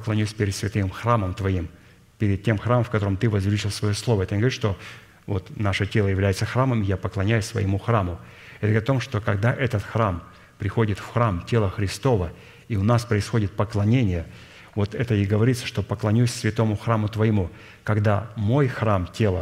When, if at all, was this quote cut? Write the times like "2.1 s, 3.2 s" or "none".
none